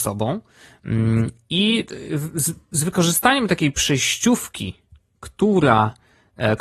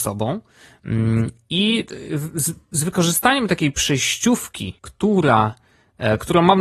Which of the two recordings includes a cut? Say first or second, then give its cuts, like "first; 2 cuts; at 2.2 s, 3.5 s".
second; 1 cut; at 4.8 s